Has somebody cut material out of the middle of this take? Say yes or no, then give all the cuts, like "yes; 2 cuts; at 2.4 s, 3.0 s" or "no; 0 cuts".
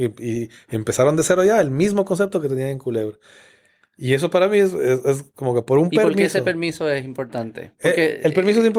yes; 1 cut; at 7.7 s